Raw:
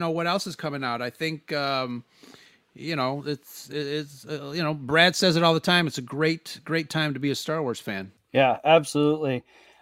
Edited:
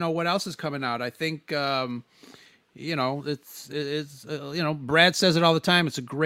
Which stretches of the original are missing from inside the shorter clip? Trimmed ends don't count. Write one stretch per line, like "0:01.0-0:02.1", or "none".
none